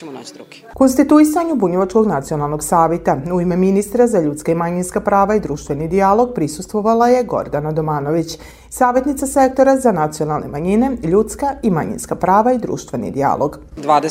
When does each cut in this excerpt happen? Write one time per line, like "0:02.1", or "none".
none